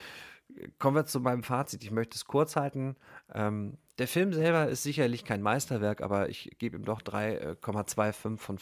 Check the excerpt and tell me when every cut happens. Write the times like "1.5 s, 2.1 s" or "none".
none